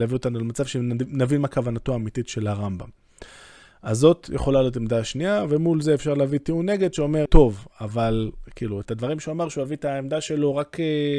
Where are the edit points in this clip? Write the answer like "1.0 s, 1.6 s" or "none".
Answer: 7.3 s